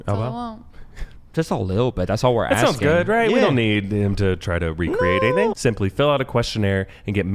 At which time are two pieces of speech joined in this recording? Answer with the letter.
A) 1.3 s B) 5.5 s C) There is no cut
B